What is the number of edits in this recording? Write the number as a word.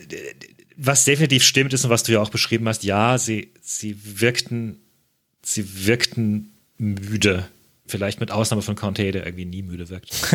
one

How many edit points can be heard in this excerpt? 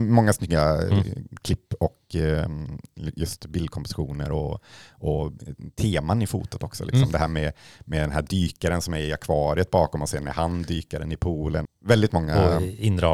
one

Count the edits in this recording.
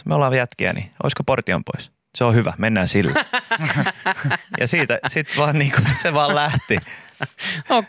zero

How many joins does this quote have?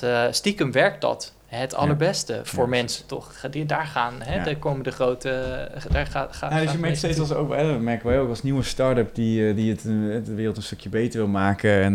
zero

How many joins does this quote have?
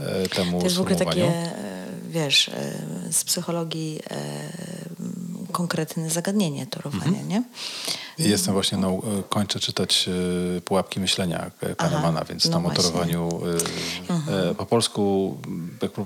two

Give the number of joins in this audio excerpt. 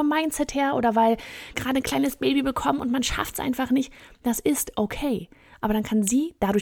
one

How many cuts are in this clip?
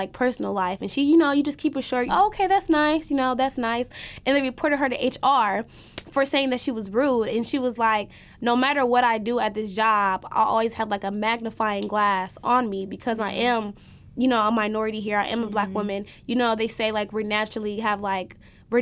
one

